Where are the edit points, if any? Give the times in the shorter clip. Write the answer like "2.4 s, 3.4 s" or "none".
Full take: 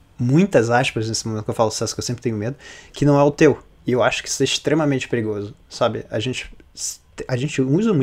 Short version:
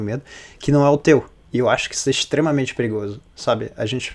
none

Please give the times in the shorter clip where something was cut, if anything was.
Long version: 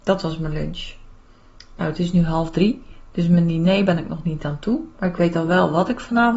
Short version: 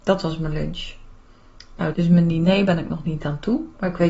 1.9 s

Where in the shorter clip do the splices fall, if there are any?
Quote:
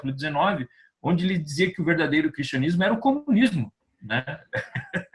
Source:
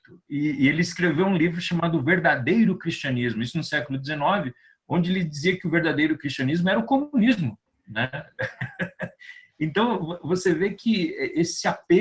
none

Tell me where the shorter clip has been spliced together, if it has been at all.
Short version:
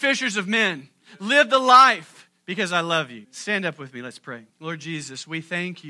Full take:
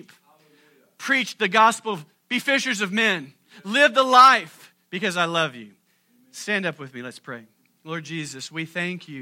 3.2 s, 4.5 s

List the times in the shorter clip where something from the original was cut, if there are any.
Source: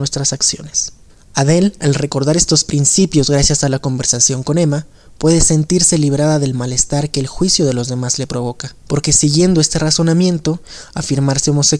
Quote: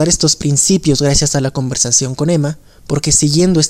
2.8 s

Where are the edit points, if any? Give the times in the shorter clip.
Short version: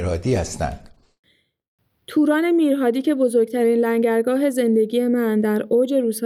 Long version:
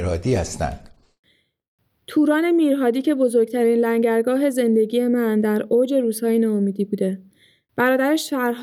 none

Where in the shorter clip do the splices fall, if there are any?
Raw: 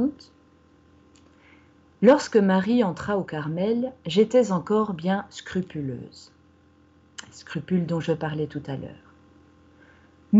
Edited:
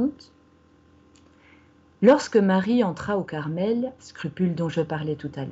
4.0 s

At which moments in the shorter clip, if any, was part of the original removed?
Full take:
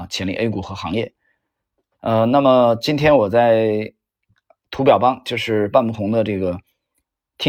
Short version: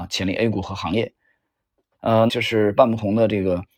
2.3 s

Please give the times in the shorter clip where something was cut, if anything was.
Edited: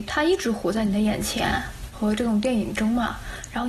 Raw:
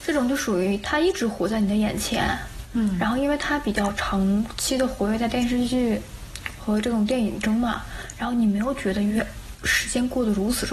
1.9 s

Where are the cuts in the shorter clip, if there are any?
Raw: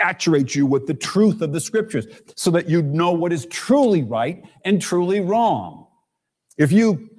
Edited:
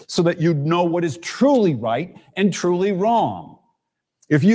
none

